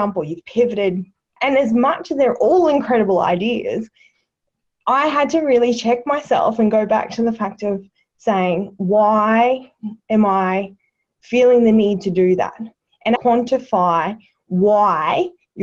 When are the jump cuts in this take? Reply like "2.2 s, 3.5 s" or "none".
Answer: 1.3 s, 13.2 s